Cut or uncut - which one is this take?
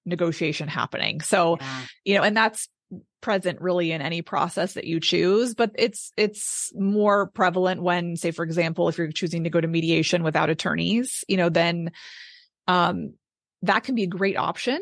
uncut